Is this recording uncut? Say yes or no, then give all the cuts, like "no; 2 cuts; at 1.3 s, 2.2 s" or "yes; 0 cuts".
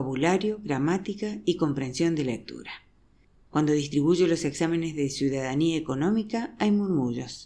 yes; 0 cuts